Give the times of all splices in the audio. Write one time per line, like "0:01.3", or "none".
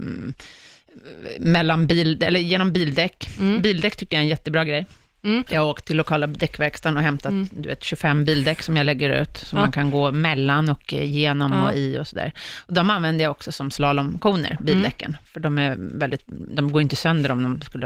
0:05.5